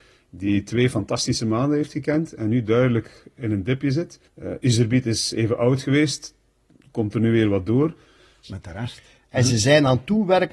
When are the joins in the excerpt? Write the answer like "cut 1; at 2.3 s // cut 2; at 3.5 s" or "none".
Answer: cut 1; at 4.3 s // cut 2; at 8.4 s